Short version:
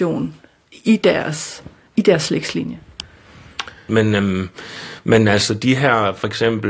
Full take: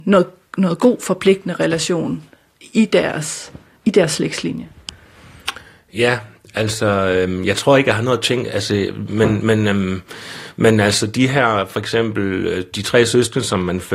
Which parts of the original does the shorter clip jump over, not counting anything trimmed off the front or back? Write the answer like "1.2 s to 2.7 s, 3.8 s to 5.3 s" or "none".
5.8 s to 9.4 s